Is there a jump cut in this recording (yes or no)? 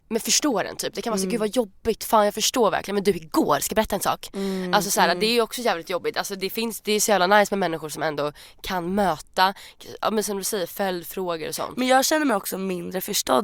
no